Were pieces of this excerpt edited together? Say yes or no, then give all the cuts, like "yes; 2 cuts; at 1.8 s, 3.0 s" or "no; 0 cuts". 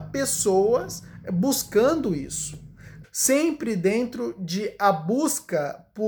yes; 1 cut; at 3.0 s